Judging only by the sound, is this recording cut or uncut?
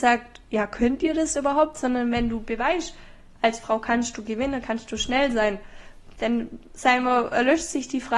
uncut